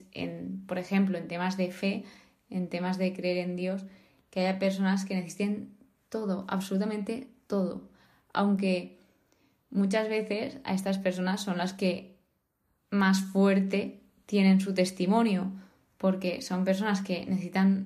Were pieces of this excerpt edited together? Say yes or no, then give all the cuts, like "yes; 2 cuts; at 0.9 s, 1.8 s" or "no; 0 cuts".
no; 0 cuts